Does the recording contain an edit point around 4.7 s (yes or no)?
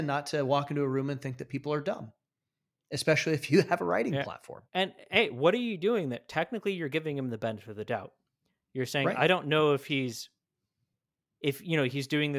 yes